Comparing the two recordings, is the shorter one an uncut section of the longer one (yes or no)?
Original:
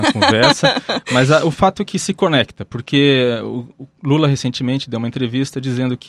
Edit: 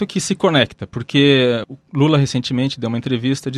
no